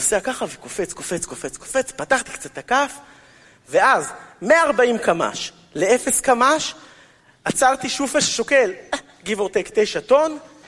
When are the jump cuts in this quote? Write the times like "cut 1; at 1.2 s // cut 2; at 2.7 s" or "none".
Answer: none